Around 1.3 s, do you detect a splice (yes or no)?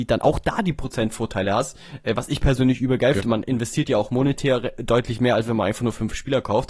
no